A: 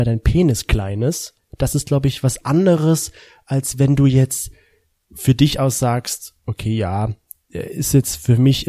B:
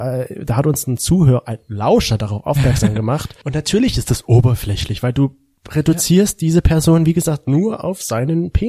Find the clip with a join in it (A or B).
B